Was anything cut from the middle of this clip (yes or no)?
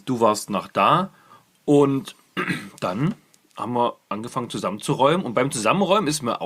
no